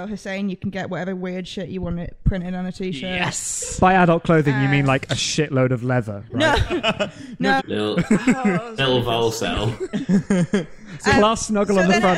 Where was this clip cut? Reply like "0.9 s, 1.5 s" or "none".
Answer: 7.6 s, 8.8 s